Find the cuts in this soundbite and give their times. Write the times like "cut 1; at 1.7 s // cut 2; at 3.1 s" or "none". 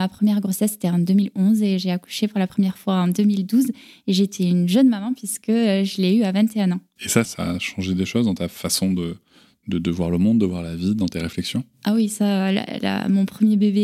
cut 1; at 7.3 s